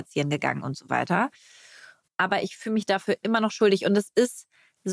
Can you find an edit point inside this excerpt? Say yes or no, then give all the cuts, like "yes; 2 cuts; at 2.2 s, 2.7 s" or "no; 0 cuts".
yes; 1 cut; at 2.1 s